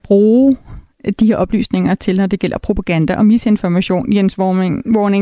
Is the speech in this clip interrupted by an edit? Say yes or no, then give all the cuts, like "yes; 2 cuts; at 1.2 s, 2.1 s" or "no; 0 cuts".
no; 0 cuts